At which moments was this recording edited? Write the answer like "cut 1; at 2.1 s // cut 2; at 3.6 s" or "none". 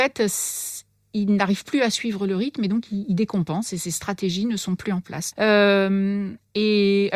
cut 1; at 5.3 s